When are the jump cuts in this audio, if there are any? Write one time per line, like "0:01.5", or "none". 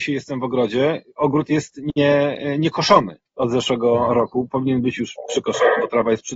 0:03.3